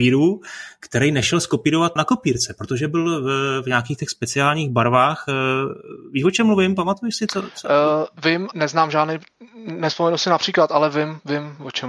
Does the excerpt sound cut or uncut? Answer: cut